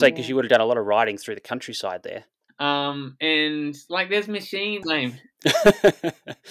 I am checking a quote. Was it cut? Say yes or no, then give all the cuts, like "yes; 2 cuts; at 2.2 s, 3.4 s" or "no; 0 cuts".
yes; 2 cuts; at 2.5 s, 4.8 s